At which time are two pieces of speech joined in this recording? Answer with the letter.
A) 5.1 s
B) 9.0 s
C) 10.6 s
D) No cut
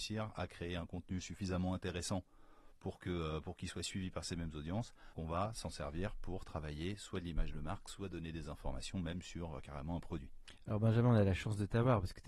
A